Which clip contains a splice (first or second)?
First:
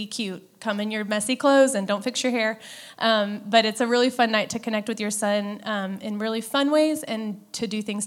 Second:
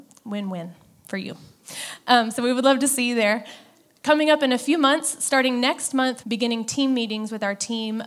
second